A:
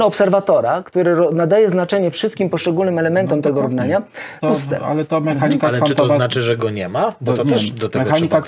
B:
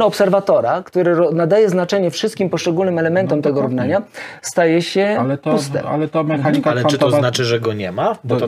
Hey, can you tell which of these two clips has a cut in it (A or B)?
A